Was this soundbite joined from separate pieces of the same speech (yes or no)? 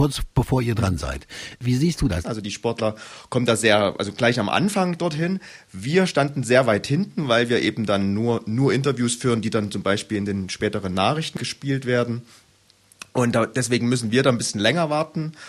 yes